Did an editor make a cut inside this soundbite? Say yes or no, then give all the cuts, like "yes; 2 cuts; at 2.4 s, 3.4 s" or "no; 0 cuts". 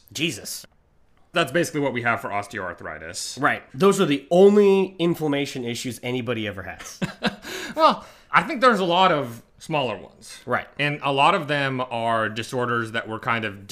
no; 0 cuts